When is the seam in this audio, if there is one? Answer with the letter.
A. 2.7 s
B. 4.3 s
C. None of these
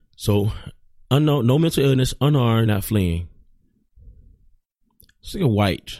A